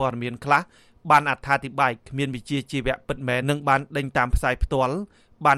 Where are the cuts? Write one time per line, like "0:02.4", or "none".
0:03.4